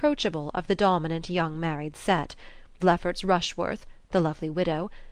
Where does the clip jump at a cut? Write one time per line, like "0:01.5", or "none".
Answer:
0:02.8